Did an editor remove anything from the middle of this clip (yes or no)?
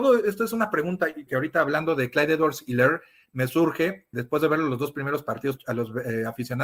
yes